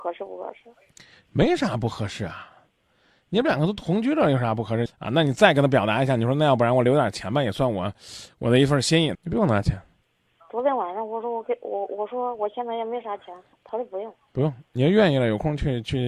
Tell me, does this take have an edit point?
yes; 3 cuts; at 4.9 s, 9.1 s, 13.5 s

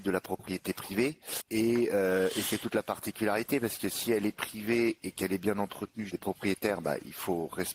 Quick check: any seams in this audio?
yes; 2 cuts; at 1.4 s, 6.1 s

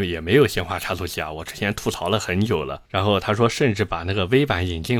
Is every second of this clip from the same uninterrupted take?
no; 1 cut; at 2.8 s

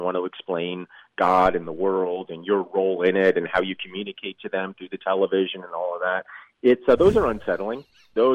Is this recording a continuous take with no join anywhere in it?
yes; 0 cuts

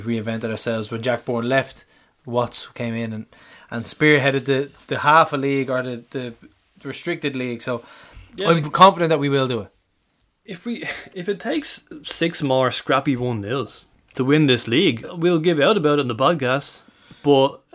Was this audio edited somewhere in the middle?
yes; 1 cut; at 15.0 s

